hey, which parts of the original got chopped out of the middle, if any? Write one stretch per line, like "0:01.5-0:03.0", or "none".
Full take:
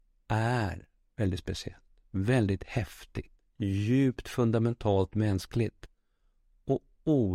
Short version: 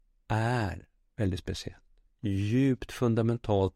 0:02.1-0:03.4